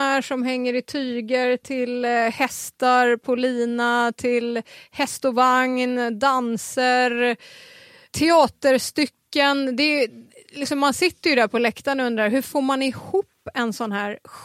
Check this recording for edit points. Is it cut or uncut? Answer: uncut